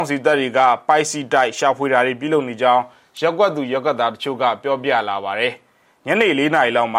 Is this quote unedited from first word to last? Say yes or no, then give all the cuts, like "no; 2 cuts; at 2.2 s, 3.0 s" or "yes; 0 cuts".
yes; 0 cuts